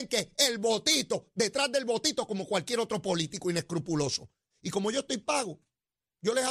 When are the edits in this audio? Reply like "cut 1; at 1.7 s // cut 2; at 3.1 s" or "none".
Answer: cut 1; at 4.5 s